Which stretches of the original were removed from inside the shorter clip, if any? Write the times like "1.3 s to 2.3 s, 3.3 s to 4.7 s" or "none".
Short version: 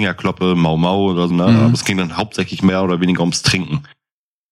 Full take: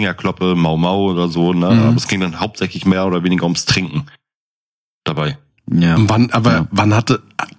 1.3 s to 1.5 s

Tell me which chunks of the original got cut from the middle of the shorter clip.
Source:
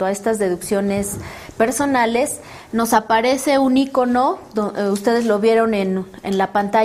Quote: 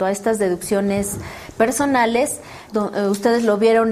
2.7 s to 4.5 s

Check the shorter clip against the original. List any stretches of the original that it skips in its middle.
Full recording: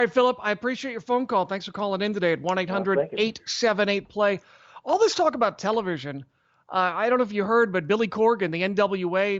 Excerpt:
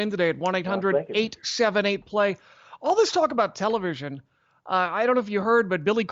none

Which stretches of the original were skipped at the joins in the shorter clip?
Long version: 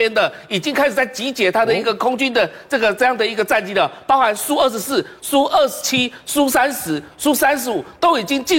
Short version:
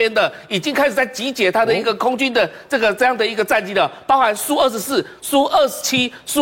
none

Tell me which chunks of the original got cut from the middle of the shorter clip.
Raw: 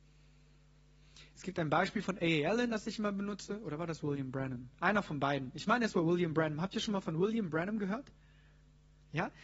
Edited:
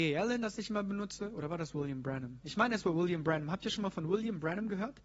4.7 s to 5.5 s

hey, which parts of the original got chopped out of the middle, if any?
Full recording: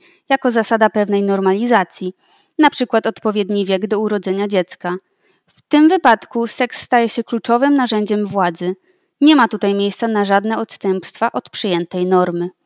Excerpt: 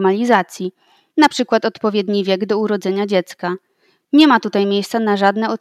5.4 s to 9.1 s

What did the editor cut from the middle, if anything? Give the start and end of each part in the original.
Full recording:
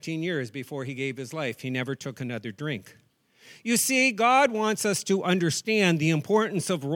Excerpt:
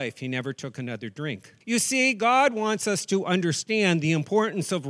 3.0 s to 3.6 s

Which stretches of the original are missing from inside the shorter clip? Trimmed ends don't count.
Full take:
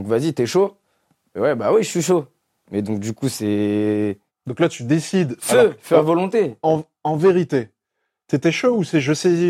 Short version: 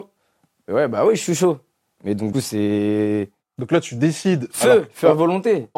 3.0 s to 3.2 s

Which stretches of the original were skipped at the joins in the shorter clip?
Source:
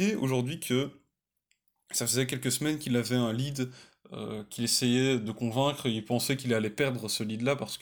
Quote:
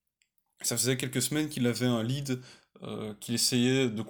none

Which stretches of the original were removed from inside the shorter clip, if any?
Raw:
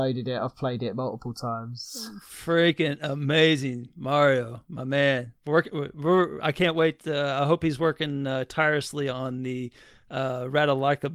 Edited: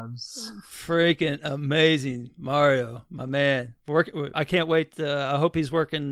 5.9 s to 6.4 s

